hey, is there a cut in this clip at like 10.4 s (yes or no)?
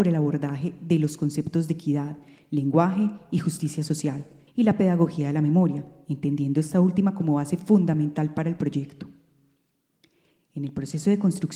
no